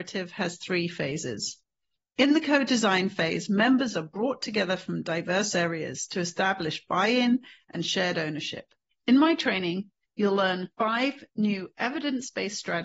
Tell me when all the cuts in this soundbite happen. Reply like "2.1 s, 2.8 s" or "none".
8.9 s, 10.7 s